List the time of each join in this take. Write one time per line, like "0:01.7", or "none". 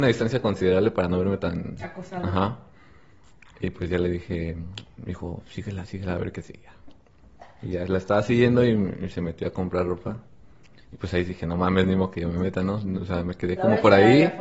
none

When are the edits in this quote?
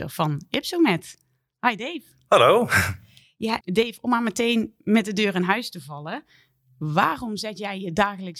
0:03.6

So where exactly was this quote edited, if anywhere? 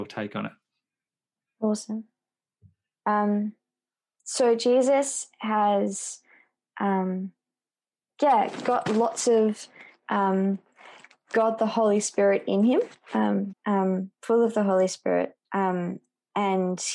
0:13.5
0:15.4

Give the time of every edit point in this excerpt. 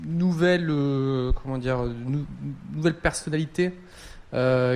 none

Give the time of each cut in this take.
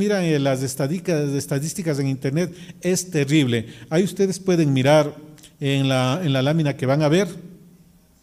none

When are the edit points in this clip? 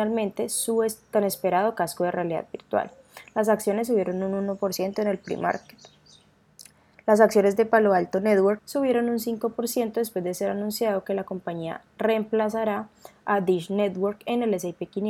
0:08.6

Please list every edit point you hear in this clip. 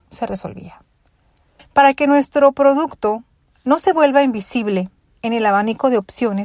0:01.6

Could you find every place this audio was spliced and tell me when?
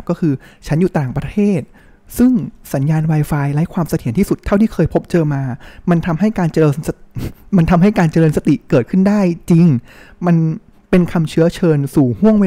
none

